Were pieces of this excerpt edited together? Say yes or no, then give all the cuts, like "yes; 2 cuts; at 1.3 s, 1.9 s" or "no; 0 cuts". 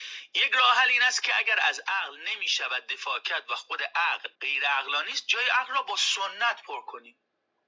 yes; 1 cut; at 4.3 s